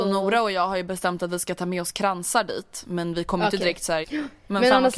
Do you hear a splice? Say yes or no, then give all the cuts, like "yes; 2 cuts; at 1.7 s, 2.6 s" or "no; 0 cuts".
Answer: yes; 1 cut; at 4.0 s